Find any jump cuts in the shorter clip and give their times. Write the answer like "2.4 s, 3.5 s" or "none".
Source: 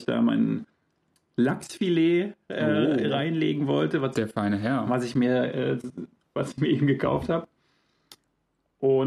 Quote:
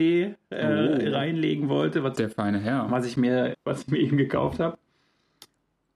3.5 s